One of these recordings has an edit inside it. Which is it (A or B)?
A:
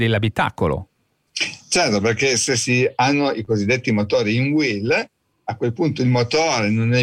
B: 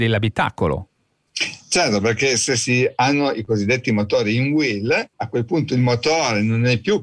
B